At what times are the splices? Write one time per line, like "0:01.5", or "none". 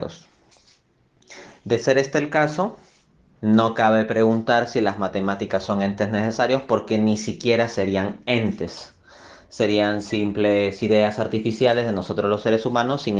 0:03.4

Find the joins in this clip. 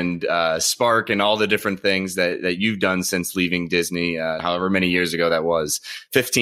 0:04.4

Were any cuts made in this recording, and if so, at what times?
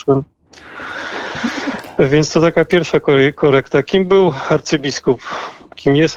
none

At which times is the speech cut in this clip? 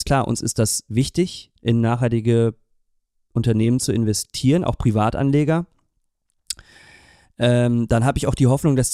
none

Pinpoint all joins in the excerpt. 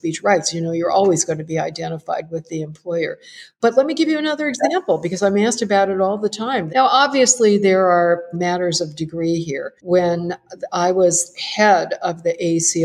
0:06.7
0:08.3
0:09.8

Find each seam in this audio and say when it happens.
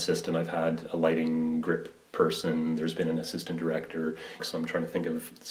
0:04.4

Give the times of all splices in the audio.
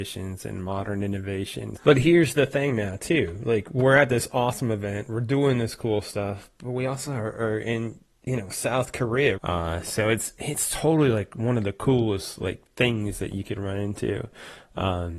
0:01.8
0:09.4

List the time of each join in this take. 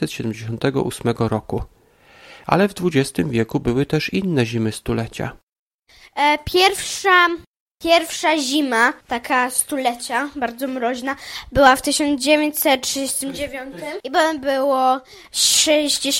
0:09.0

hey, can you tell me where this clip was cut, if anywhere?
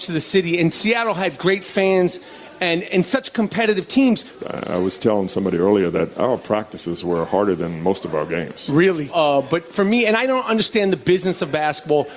0:02.8
0:04.4
0:09.1

